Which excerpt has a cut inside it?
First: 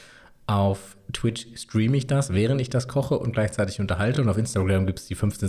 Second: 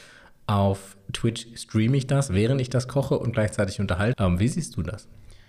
second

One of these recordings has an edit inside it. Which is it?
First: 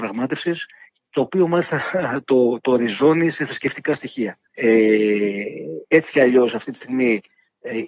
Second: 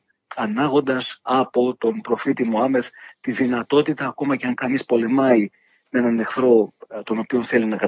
first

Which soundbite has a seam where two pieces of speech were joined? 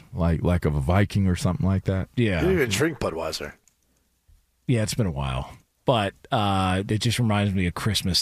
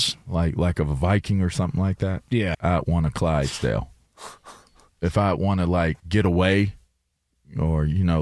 second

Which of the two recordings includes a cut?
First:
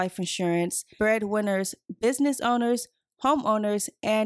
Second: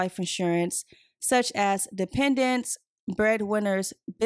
first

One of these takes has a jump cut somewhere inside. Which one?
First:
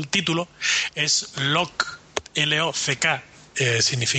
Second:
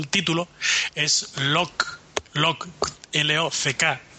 first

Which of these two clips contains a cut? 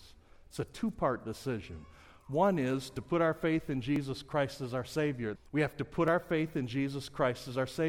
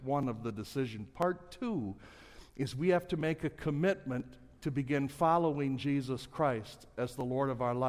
first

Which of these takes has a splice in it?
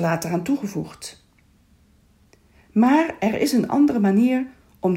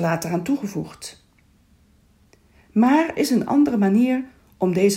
second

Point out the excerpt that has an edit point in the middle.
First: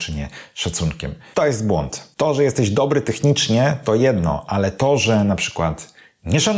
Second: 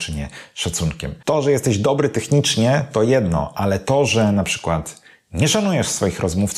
second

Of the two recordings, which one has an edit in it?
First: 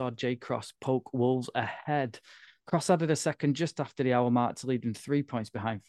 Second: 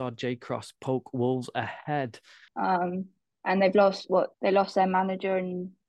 second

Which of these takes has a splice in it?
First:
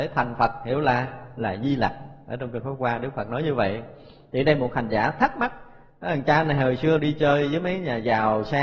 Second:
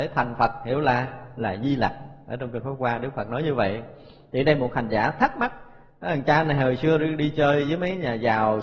first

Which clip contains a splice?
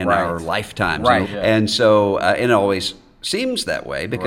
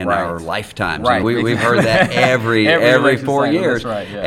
first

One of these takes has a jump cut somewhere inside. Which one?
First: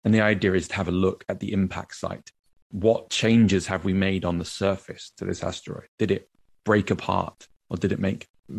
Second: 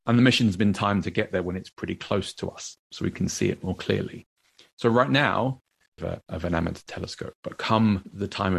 second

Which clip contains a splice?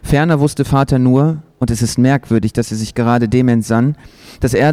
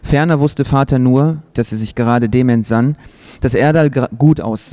second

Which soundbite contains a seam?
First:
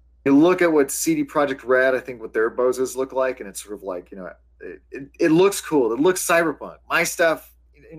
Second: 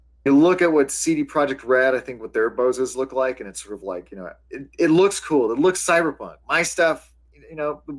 second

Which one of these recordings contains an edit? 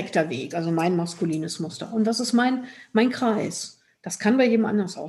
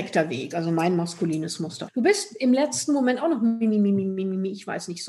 second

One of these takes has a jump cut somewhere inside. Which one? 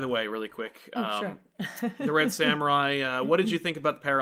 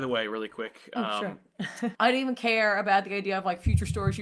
second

